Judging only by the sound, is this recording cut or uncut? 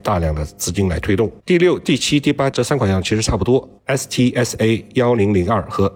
cut